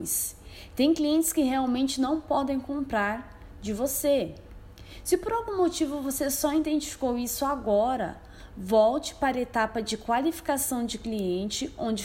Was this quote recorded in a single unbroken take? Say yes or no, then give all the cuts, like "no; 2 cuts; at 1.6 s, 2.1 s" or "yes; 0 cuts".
yes; 0 cuts